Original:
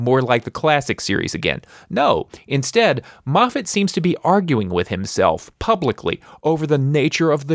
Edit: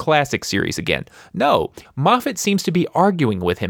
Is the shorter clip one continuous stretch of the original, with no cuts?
no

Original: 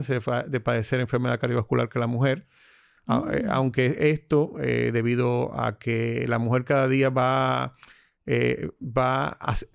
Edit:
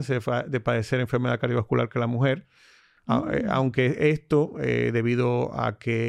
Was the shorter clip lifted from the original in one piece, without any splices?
yes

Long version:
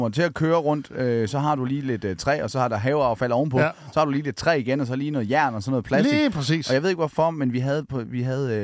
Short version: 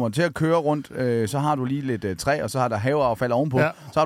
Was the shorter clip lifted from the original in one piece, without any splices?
yes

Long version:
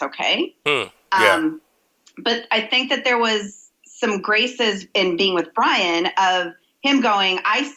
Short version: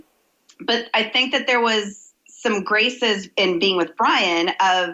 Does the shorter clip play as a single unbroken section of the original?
yes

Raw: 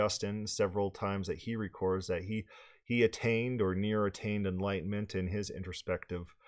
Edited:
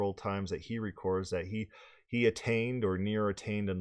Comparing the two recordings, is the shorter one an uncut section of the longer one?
yes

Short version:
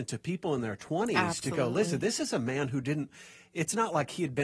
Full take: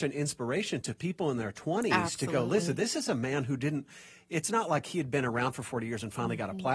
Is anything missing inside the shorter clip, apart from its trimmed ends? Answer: no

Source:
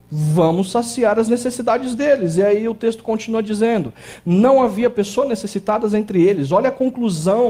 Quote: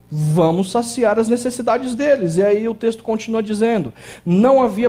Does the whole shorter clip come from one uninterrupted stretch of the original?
yes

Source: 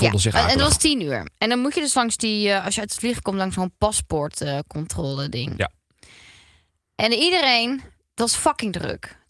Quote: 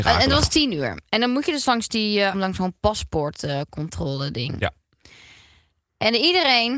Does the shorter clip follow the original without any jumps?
no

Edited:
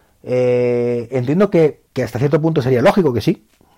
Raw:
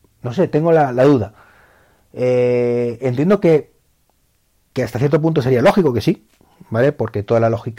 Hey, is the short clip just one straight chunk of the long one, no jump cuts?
no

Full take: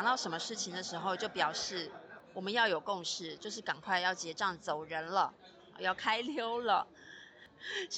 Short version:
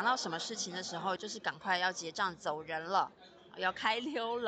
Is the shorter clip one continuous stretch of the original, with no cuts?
no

